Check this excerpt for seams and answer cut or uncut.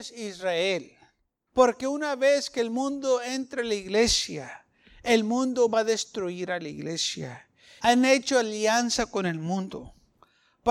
cut